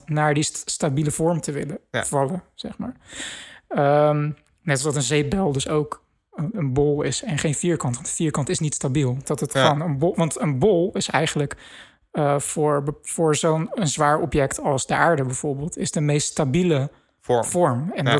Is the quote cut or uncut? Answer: cut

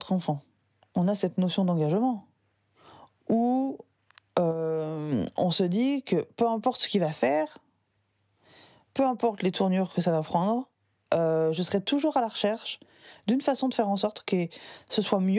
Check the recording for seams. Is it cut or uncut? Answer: uncut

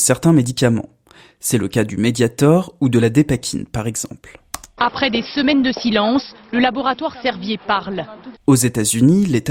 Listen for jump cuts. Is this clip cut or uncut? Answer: cut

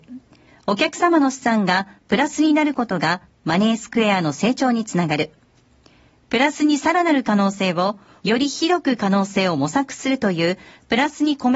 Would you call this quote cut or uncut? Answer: cut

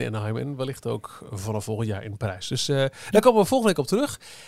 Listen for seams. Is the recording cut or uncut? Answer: uncut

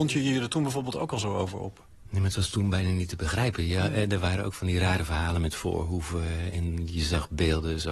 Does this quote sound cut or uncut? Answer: uncut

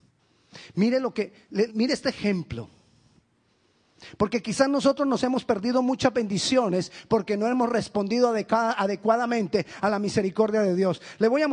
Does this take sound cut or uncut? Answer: cut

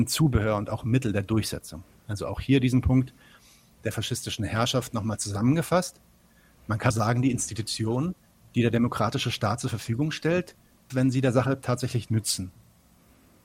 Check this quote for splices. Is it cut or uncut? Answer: cut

